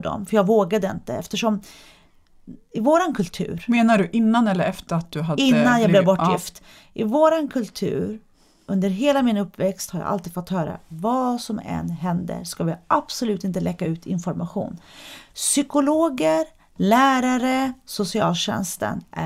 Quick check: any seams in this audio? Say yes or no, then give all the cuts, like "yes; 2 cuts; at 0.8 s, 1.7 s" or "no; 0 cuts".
no; 0 cuts